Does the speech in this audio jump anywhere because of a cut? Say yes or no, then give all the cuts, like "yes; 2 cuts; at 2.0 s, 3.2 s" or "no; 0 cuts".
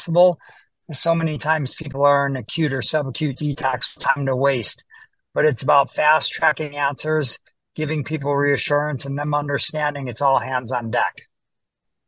no; 0 cuts